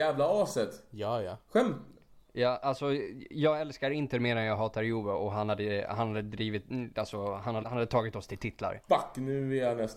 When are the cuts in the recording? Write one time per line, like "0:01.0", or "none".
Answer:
0:07.6
0:08.9